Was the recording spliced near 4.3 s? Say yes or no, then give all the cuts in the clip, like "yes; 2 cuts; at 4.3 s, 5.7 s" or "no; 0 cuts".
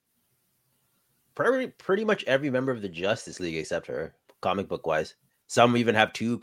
yes; 1 cut; at 4.3 s